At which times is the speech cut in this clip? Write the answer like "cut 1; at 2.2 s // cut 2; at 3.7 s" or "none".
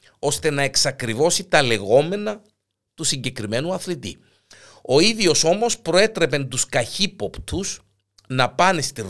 none